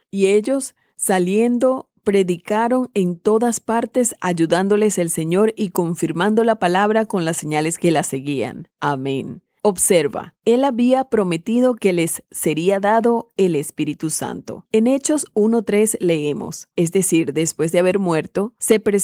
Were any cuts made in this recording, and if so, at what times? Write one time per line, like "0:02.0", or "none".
0:16.7